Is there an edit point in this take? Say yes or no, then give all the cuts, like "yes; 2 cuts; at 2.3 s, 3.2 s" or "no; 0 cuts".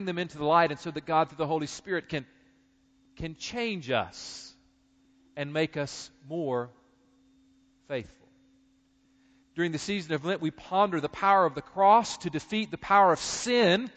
yes; 1 cut; at 9.4 s